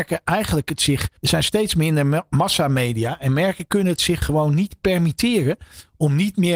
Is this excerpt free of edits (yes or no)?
no